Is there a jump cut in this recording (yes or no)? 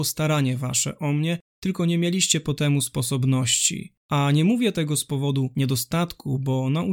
yes